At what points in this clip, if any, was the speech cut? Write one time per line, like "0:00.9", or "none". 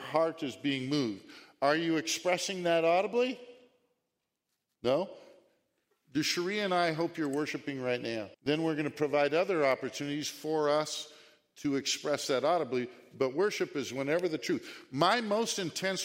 0:08.3